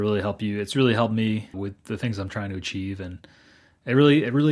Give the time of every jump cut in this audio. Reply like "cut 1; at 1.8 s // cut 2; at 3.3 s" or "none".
cut 1; at 1.5 s